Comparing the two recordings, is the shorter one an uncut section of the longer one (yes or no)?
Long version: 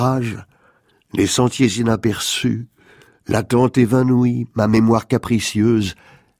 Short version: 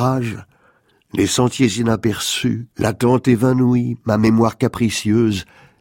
no